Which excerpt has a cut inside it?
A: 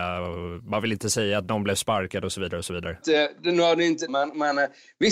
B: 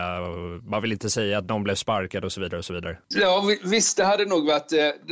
A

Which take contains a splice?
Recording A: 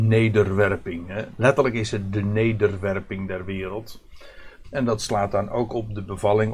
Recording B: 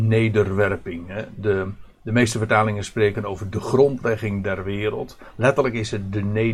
A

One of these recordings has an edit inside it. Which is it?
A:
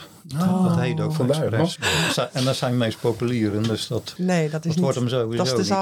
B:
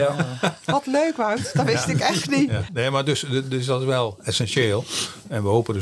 A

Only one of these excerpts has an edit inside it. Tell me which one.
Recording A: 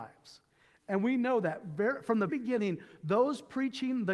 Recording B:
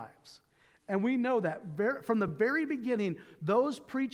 A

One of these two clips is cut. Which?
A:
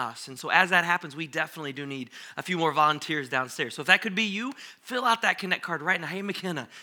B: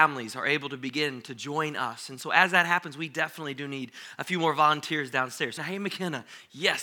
B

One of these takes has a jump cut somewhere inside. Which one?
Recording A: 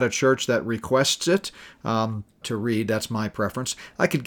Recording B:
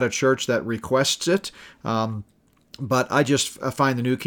A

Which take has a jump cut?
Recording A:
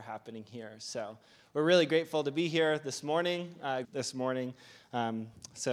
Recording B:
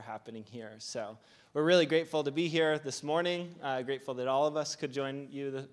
A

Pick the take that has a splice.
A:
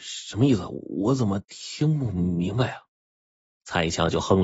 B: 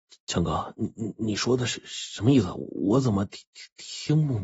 A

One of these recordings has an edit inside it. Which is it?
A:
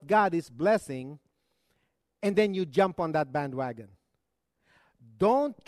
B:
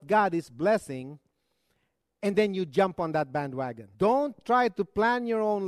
B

